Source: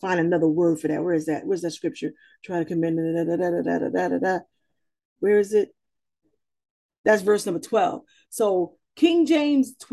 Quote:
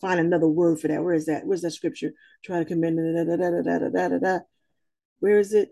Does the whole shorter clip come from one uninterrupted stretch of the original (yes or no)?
yes